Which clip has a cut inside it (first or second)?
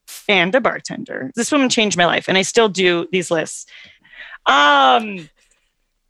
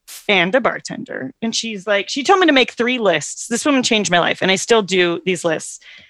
first